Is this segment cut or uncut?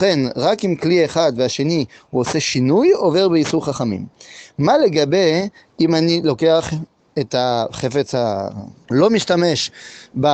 cut